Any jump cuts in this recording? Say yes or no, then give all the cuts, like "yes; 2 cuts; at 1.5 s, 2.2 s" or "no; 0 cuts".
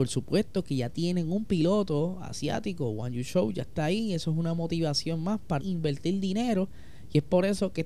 yes; 1 cut; at 5.6 s